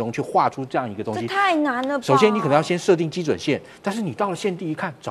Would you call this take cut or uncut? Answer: uncut